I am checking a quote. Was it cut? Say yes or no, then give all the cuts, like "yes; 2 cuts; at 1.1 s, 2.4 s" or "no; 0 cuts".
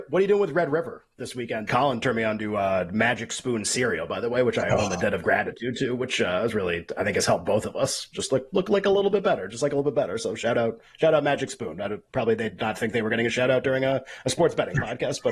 yes; 1 cut; at 1.7 s